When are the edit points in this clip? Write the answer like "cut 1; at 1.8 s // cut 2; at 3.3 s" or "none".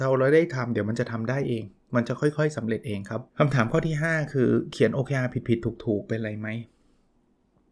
cut 1; at 3.3 s